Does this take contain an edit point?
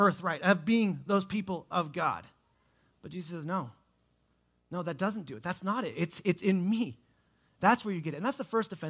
no; 0 cuts

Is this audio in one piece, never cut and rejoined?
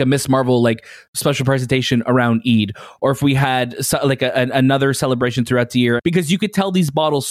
no; 1 cut; at 6.0 s

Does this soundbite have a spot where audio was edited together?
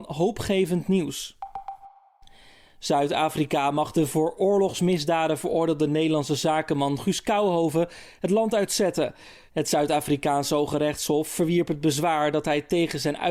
yes; 1 cut; at 9.5 s

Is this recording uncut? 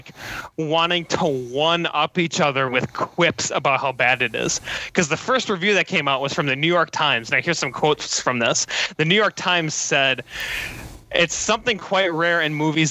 yes; 0 cuts

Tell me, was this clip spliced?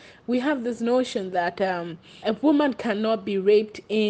yes; 1 cut; at 2.2 s

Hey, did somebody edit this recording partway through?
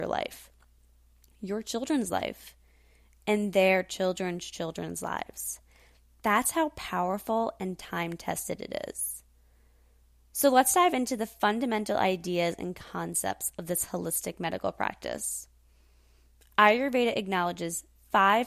no; 0 cuts

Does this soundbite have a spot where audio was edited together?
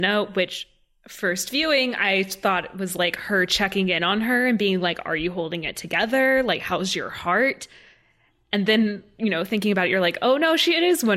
no; 0 cuts

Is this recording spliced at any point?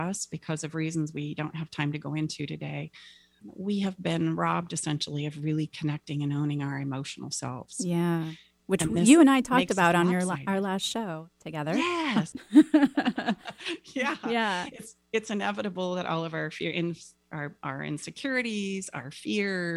yes; 2 cuts; at 3.4 s, 12.3 s

